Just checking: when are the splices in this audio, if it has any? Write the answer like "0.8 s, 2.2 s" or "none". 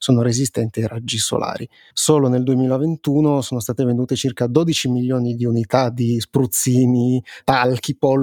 1.9 s